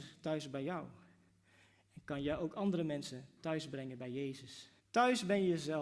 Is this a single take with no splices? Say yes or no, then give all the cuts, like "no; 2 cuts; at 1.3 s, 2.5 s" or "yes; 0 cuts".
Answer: no; 1 cut; at 4.8 s